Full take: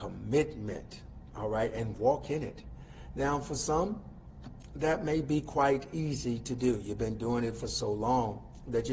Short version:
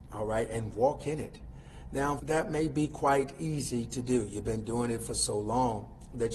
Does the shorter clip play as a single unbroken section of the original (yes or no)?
no